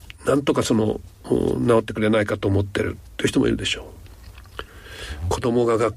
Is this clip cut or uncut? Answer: uncut